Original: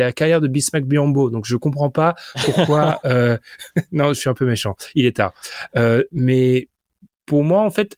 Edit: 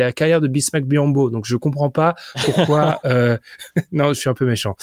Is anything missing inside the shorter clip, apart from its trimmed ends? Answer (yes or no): no